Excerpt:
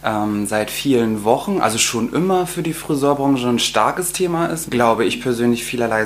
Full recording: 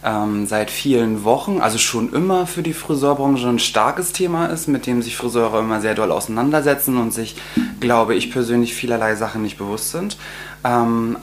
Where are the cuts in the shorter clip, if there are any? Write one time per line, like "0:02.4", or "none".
0:04.7

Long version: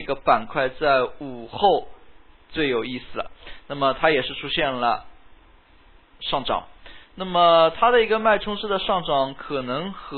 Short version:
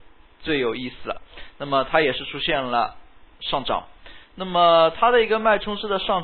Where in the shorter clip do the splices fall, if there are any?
0:03.3

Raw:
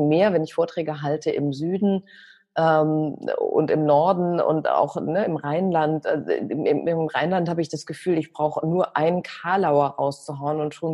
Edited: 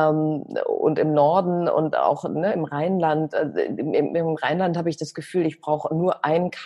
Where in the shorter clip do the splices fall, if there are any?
none

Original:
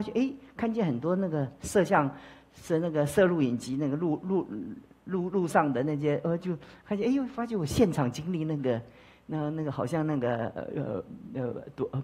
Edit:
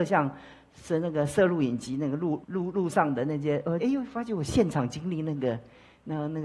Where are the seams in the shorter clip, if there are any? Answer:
0:02.4
0:03.8

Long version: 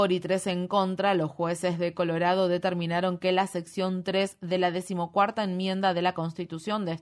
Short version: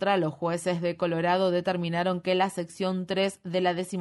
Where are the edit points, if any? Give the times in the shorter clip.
none

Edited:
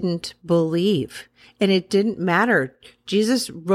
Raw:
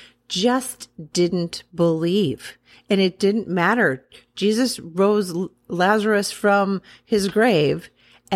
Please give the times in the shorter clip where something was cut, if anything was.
none

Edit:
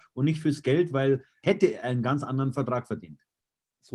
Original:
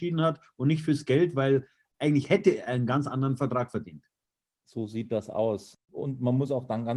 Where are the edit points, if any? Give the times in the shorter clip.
0:01.4

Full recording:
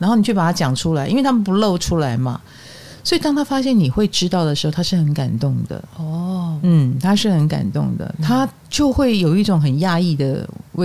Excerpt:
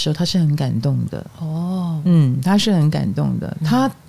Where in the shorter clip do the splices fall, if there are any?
none

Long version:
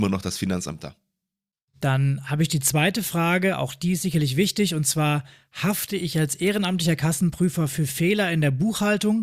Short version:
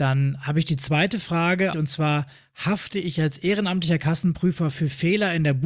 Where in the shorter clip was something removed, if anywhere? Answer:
0:01.7

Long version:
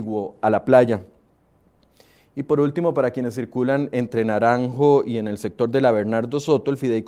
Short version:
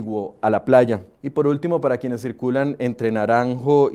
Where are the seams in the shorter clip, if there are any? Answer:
0:01.1

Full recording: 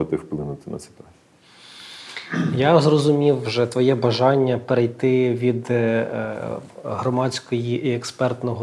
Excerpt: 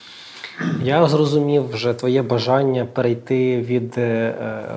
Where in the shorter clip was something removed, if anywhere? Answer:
none

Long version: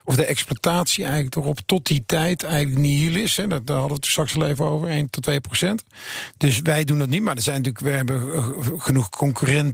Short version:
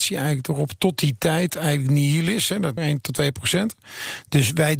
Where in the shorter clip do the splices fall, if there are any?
0:02.8

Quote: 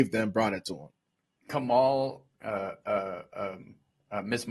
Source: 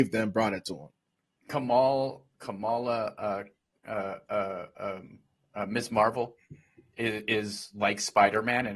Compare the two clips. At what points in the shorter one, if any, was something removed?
0:02.4

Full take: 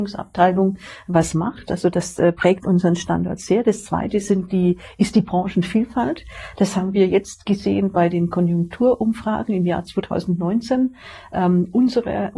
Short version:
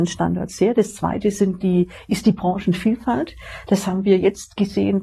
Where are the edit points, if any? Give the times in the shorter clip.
none

